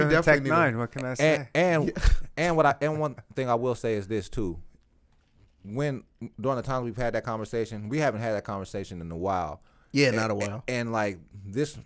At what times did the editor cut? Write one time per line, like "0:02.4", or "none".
none